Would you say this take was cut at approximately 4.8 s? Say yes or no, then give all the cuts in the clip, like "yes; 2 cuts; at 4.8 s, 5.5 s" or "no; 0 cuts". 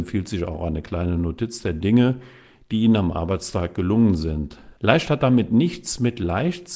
yes; 1 cut; at 4.8 s